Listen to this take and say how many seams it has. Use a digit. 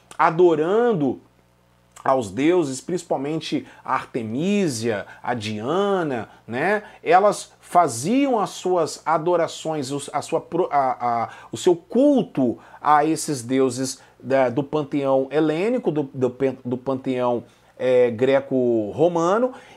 0